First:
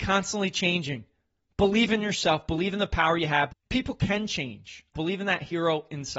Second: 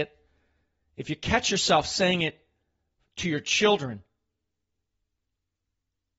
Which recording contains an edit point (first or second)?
first